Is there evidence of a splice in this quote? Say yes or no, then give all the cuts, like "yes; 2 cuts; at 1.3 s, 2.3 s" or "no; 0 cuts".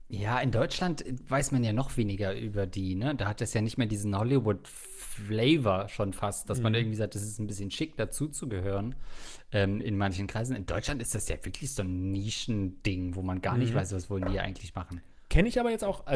yes; 1 cut; at 9.8 s